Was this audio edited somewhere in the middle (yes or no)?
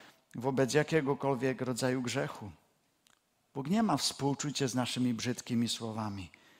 no